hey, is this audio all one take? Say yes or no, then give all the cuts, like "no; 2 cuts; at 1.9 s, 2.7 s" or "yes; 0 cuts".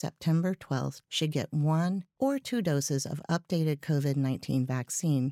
no; 1 cut; at 1.0 s